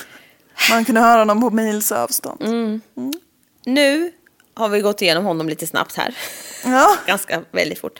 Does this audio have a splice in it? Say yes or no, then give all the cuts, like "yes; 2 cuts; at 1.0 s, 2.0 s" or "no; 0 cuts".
no; 0 cuts